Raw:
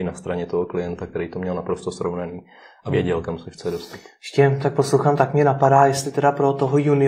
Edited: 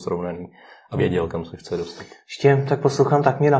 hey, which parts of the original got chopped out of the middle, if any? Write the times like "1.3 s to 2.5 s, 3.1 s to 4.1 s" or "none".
none